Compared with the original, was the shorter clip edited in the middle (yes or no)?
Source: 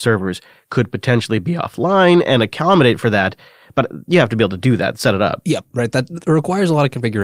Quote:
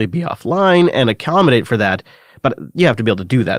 no